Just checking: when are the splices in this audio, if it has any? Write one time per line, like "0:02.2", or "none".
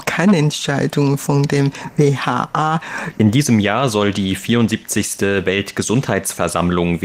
0:03.1